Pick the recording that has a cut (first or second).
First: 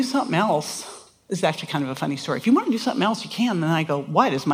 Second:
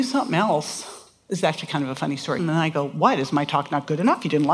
second